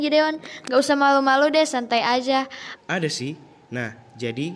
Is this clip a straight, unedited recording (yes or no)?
no